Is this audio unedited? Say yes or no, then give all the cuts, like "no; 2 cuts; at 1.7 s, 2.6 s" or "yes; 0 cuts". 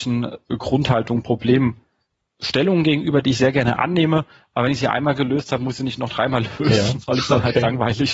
yes; 0 cuts